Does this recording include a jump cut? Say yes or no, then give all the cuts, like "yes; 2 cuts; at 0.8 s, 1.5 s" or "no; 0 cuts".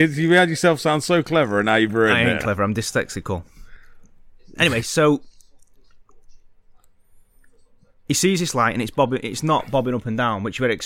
no; 0 cuts